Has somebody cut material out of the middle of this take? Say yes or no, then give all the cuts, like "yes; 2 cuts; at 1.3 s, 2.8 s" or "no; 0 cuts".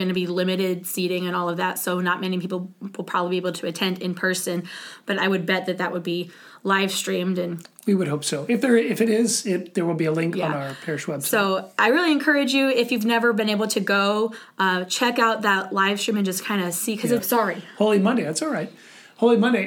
yes; 1 cut; at 17.2 s